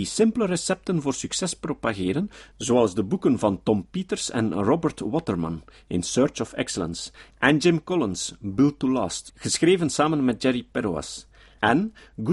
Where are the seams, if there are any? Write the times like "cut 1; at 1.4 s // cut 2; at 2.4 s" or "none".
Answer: cut 1; at 9.3 s